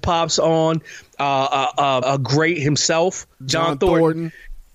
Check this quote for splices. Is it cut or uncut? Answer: cut